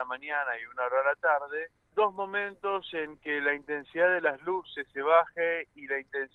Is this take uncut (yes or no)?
no